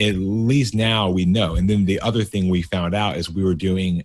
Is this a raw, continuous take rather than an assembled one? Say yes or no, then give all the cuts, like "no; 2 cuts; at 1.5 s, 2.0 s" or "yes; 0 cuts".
yes; 0 cuts